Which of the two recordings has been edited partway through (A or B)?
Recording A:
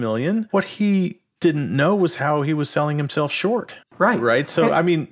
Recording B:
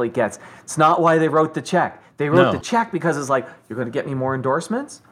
A